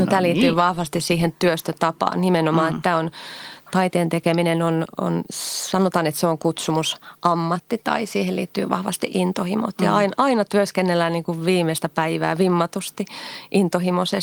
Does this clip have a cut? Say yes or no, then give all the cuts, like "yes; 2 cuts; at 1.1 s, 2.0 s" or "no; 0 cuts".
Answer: no; 0 cuts